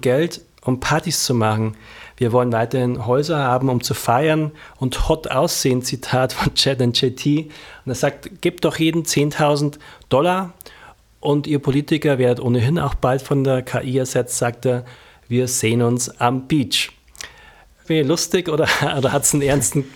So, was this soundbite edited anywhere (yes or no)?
yes